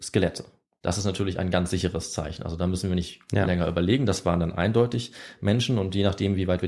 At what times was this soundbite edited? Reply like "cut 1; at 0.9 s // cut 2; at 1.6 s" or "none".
none